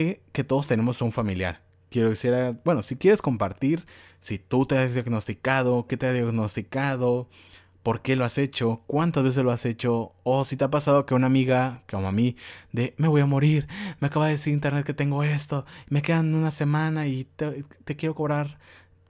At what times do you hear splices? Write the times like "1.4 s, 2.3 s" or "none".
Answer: none